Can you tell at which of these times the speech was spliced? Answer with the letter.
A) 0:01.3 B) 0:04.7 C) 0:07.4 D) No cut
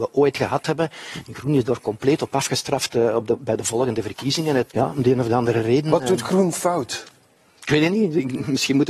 B